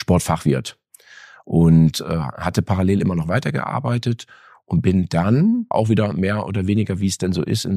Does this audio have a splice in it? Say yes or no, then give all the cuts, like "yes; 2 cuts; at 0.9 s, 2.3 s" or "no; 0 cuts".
yes; 1 cut; at 5.7 s